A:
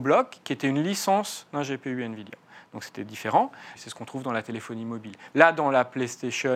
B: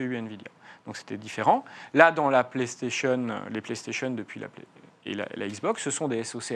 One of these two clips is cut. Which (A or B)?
A